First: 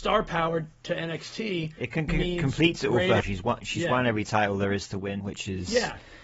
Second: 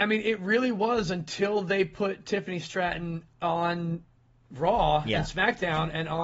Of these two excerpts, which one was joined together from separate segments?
first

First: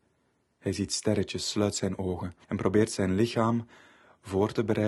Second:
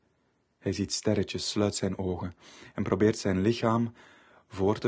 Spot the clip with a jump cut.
first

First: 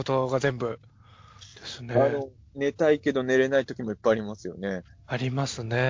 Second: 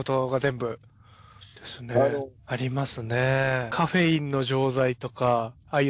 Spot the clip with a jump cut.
second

